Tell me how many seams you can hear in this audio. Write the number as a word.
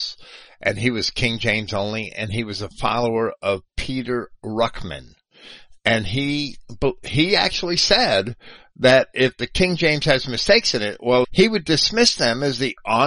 one